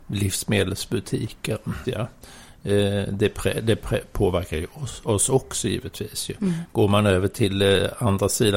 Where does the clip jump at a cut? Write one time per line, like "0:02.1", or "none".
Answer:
0:01.8
0:06.7